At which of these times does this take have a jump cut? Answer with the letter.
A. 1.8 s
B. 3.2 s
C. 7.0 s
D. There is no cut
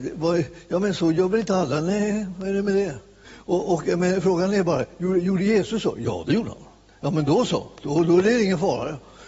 B